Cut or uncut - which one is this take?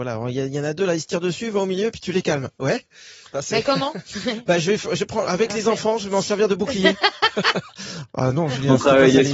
uncut